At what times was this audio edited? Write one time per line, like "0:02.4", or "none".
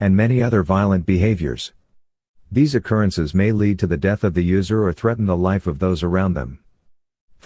none